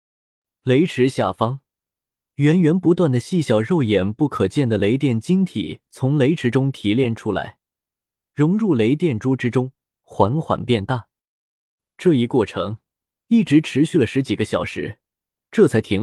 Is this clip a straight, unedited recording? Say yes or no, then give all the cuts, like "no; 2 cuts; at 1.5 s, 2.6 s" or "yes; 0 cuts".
yes; 0 cuts